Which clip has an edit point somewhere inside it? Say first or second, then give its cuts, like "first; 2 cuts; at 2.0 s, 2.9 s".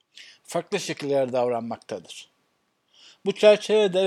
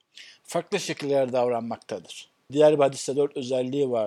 second; 1 cut; at 2.5 s